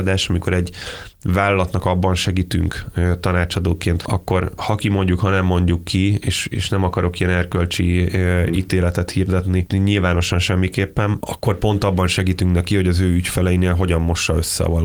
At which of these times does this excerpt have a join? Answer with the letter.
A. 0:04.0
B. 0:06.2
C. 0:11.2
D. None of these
A